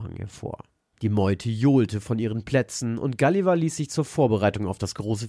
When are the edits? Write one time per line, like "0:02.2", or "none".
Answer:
0:00.9